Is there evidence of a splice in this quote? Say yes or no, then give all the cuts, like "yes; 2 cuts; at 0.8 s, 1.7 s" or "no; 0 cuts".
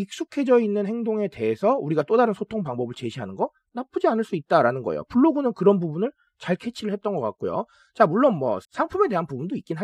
yes; 1 cut; at 8.6 s